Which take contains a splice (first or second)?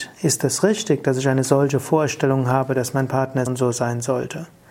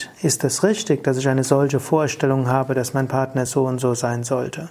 first